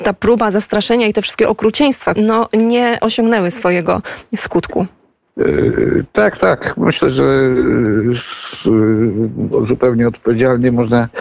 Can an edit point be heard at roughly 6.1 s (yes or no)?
no